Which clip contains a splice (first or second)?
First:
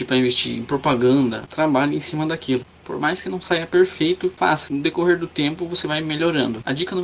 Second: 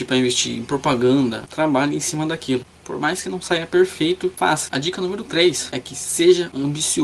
second